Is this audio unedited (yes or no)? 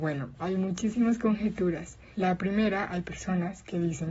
no